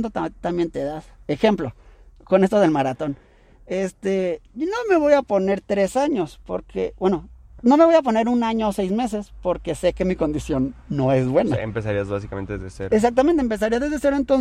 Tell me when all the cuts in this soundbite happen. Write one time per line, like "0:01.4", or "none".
none